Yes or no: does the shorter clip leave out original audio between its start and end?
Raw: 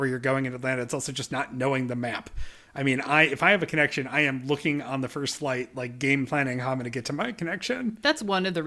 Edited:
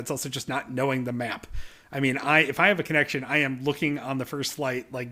no